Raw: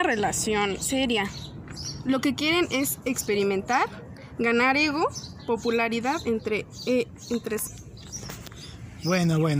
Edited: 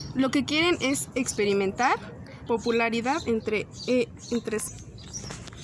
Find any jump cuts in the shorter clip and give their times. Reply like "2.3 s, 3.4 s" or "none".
2.5 s